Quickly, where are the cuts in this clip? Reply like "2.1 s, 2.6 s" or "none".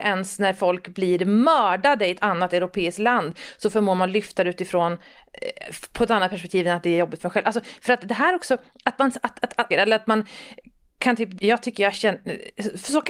9.7 s, 11.4 s